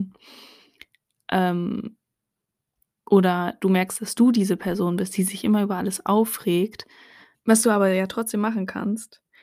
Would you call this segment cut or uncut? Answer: cut